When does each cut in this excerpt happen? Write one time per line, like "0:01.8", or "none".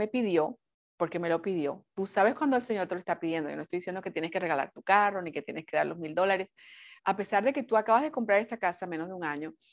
0:07.0